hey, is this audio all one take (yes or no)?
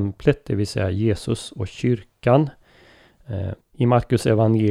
no